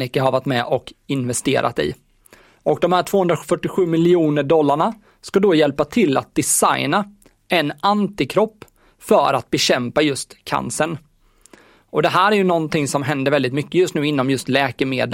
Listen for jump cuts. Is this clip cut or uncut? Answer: uncut